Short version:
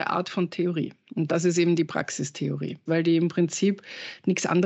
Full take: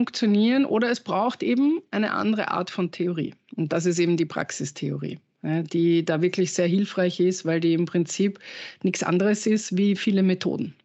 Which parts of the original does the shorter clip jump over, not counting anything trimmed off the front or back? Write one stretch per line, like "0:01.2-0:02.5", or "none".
0:05.3-0:07.4